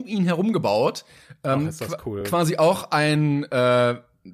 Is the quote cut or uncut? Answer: uncut